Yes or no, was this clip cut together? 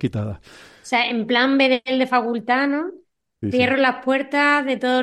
no